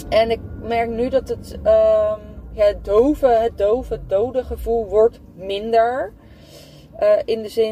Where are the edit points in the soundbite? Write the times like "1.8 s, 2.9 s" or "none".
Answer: none